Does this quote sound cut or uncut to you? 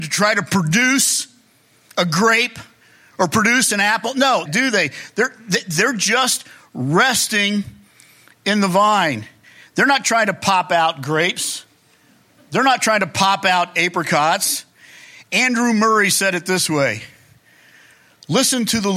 cut